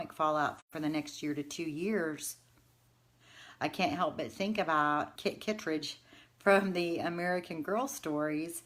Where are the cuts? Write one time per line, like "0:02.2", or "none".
0:05.2